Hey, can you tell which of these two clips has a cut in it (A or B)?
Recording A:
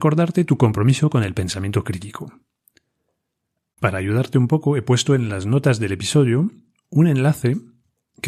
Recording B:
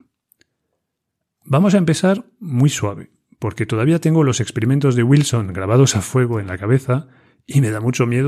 A